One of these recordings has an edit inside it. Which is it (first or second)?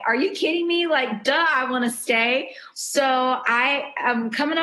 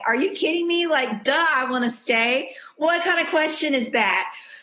first